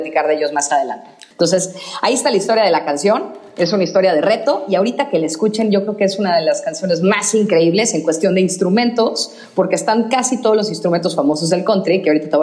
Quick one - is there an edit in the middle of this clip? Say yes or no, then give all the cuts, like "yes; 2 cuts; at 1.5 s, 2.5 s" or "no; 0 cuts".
yes; 1 cut; at 1.3 s